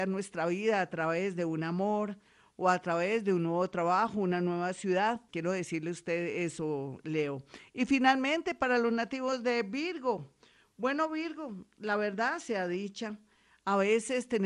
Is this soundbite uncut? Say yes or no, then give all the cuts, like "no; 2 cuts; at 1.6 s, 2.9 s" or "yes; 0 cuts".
no; 1 cut; at 5.3 s